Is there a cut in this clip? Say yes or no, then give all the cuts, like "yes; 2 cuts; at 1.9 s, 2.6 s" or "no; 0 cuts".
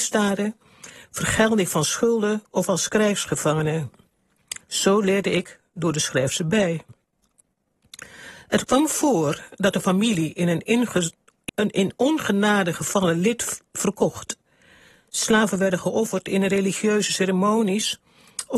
yes; 1 cut; at 11.5 s